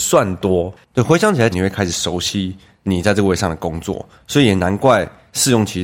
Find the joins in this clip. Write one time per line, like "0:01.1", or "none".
0:01.5